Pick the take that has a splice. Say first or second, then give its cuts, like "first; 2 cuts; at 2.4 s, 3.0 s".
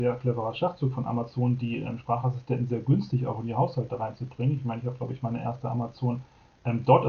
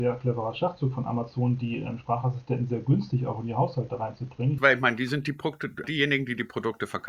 second; 2 cuts; at 4.6 s, 5.8 s